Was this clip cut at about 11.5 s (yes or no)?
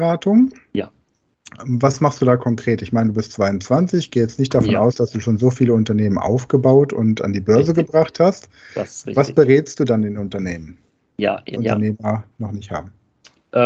yes